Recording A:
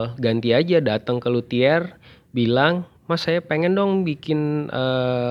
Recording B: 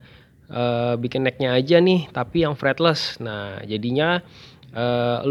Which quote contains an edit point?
A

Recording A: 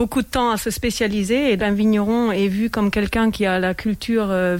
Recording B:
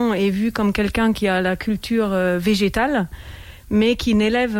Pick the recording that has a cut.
A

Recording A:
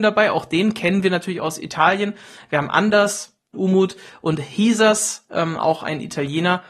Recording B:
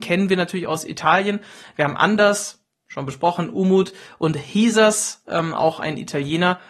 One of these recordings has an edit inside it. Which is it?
A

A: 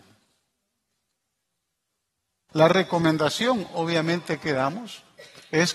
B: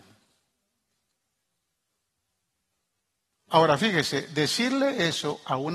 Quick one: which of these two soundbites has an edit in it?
A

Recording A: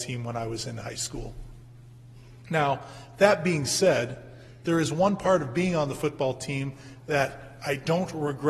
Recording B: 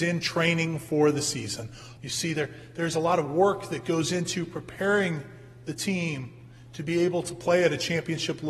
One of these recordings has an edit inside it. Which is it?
B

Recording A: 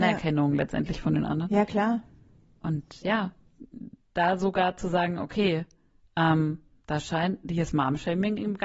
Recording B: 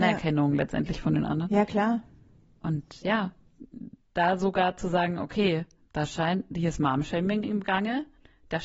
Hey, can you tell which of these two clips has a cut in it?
B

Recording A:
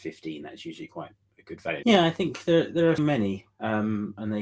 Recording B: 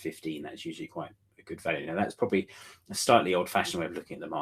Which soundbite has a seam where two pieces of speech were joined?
A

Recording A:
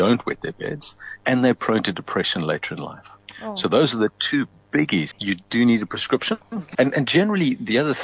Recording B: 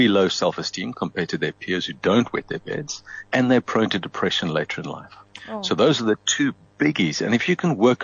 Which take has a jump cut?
A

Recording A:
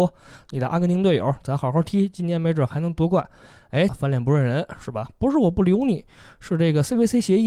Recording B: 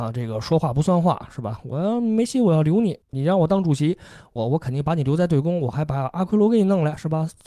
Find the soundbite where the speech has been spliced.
A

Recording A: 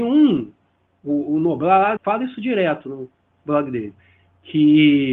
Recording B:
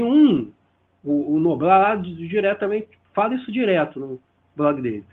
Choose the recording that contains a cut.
A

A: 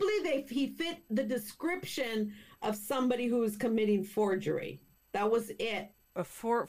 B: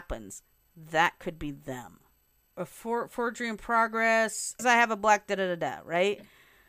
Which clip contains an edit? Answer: B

